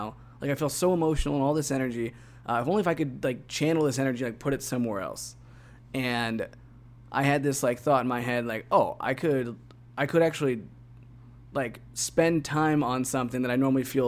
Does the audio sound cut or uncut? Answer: uncut